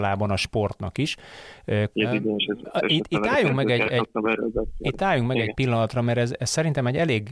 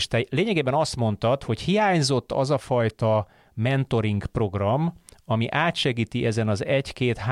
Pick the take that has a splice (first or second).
first